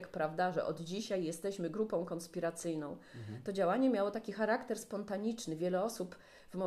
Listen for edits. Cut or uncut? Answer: uncut